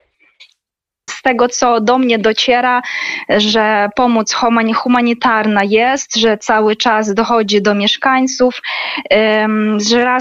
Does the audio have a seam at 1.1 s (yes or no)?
yes